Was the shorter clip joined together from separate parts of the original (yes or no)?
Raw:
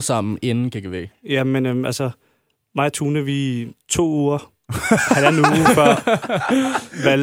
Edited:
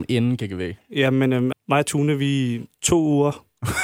yes